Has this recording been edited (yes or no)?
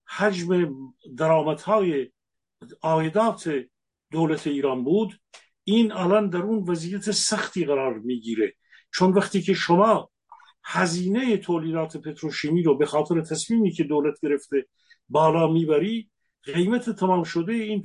no